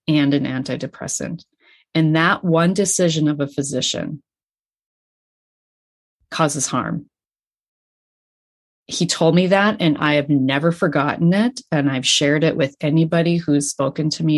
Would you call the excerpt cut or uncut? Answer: uncut